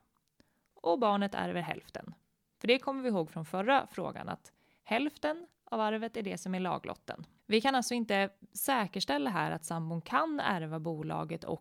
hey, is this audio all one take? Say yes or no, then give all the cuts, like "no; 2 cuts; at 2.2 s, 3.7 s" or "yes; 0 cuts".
yes; 0 cuts